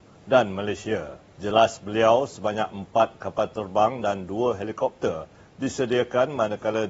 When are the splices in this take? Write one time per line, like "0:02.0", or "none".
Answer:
0:01.3